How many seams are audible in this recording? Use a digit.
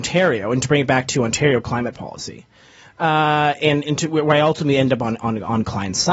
1